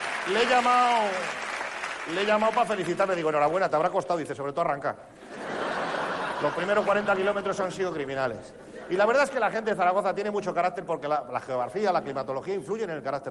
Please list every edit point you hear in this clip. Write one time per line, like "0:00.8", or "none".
none